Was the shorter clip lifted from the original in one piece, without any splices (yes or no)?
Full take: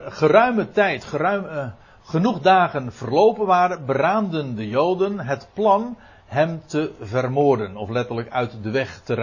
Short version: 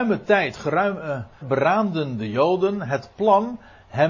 no